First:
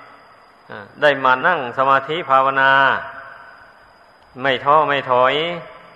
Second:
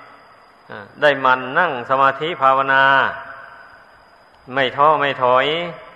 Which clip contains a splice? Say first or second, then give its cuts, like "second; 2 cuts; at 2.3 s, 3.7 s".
first; 1 cut; at 1.4 s